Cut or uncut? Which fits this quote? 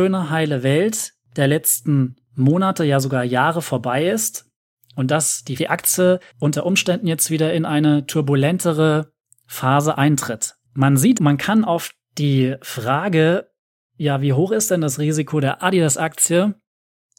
cut